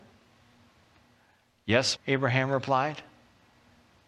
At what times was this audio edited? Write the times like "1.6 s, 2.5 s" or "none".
2.0 s